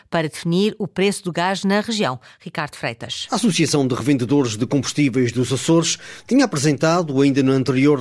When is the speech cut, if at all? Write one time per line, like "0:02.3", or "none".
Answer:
none